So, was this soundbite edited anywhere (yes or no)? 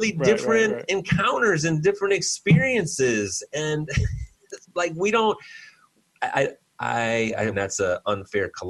yes